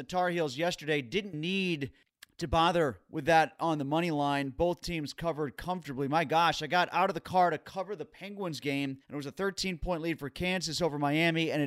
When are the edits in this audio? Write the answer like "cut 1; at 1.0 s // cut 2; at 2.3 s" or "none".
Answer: cut 1; at 1.3 s // cut 2; at 9.0 s

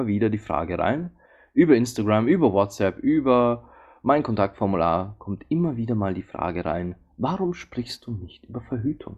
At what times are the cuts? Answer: none

